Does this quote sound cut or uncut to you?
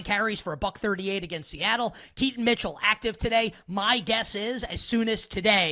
uncut